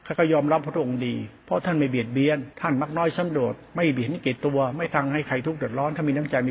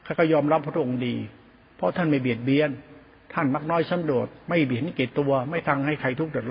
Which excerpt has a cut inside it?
first; 2 cuts; at 1.4 s, 2.5 s

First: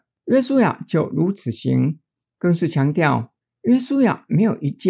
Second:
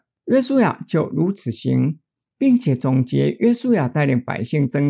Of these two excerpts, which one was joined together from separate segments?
second; 1 cut; at 2.3 s

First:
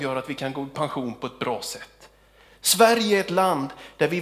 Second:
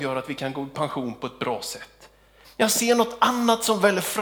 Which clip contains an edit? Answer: second; 1 cut; at 2.4 s

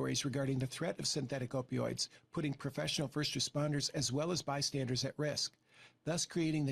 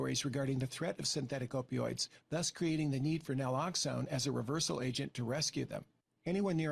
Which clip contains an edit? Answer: second; 1 cut; at 2.2 s

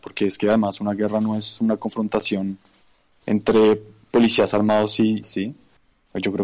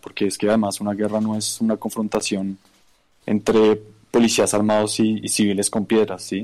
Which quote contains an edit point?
first; 1 cut; at 5.2 s

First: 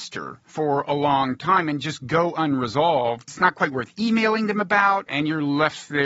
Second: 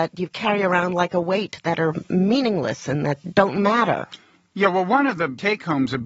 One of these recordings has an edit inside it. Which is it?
first; 1 cut; at 3.3 s

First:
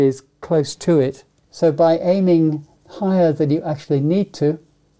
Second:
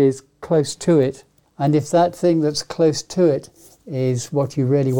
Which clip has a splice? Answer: first; 1 cut; at 1.4 s

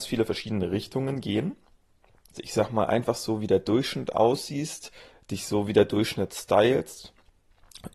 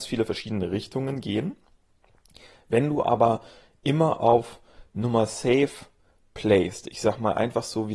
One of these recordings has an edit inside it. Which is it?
first; 1 cut; at 2.3 s

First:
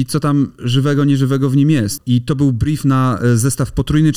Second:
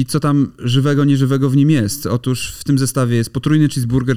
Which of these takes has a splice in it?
first; 1 cut; at 2.0 s

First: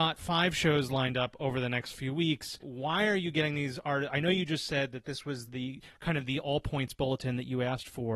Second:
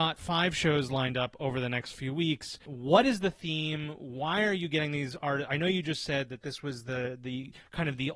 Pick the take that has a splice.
first; 2 cuts; at 2.6 s, 5.5 s

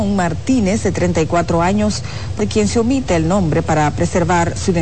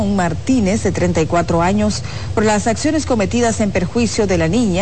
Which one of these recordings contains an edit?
first; 1 cut; at 2.4 s

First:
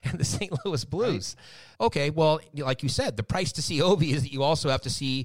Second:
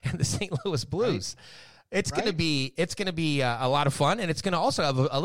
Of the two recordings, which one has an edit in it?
first; 1 cut; at 1.7 s

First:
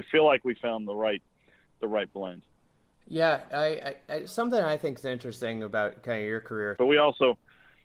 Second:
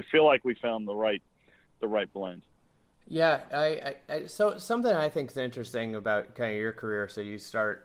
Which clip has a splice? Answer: first; 2 cuts; at 4.3 s, 6.8 s

